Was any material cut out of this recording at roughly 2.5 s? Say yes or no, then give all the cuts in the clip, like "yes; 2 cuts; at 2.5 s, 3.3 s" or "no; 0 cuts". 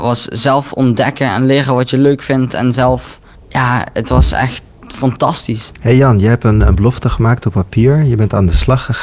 no; 0 cuts